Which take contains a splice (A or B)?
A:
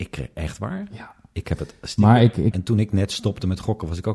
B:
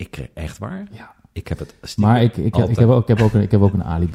A